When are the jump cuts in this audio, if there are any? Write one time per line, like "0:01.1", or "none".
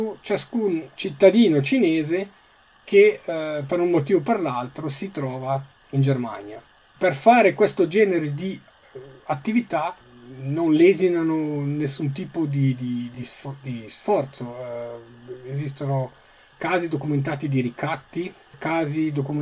none